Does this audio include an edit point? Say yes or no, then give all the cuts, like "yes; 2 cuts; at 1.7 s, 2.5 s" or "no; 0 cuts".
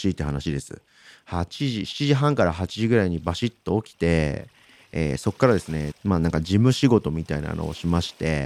yes; 1 cut; at 5.9 s